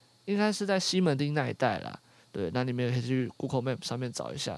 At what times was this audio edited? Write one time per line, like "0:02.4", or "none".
0:02.2